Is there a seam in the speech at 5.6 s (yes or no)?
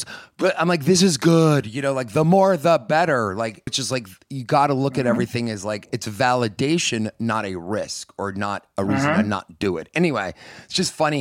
no